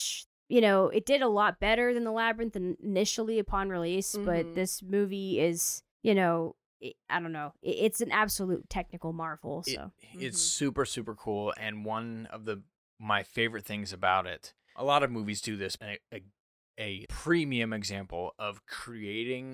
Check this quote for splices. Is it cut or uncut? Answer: cut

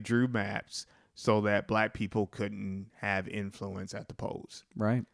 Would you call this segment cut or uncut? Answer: uncut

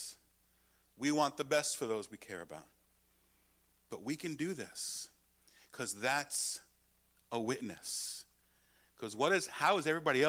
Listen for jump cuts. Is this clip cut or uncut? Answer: uncut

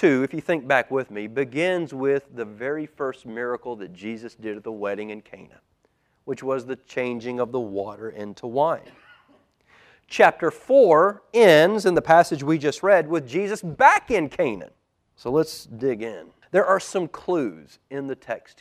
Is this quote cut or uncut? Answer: cut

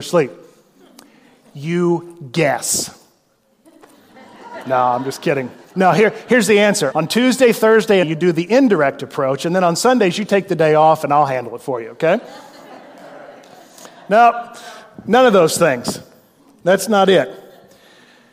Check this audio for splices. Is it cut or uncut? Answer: cut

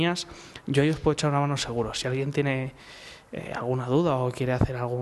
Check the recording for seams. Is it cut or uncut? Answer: uncut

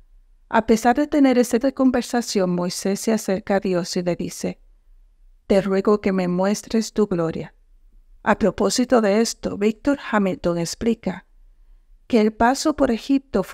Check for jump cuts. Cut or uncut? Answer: cut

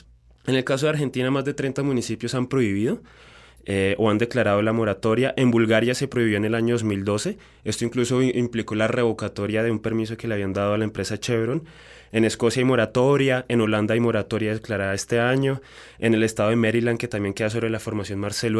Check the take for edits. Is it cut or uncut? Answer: uncut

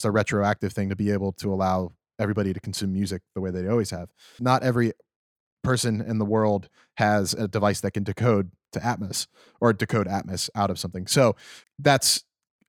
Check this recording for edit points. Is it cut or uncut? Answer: cut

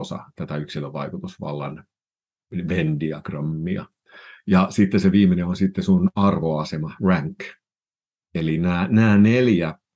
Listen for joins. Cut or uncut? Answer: uncut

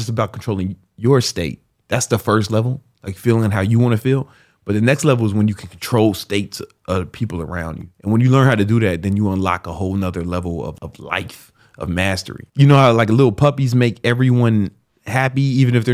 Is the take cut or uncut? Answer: cut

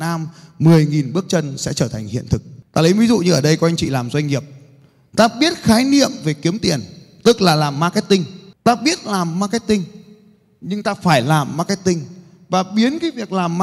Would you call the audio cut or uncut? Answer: uncut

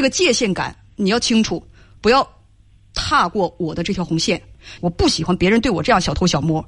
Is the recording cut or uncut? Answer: cut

